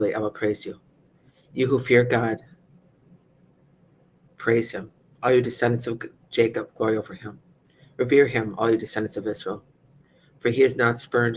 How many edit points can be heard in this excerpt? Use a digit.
0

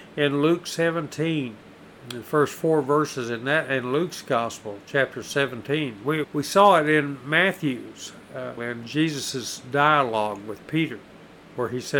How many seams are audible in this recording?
2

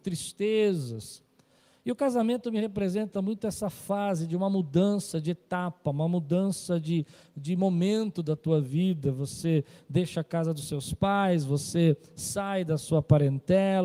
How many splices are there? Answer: 0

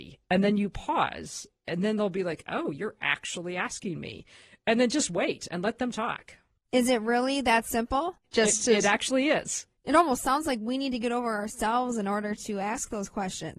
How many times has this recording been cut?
0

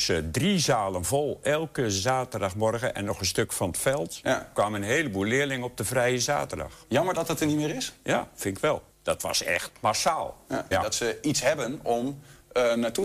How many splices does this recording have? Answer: 2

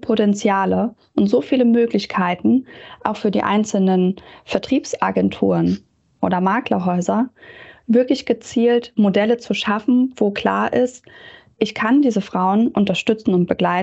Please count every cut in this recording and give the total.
0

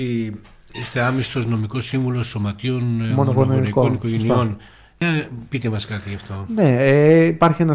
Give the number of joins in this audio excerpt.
0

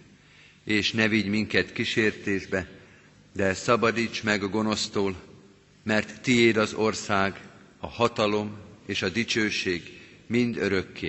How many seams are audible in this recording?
0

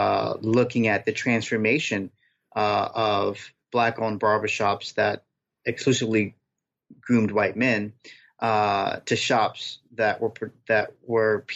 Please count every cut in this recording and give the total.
0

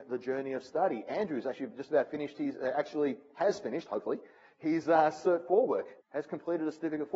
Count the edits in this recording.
1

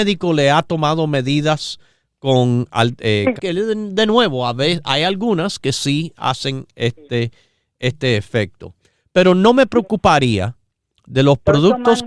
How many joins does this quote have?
1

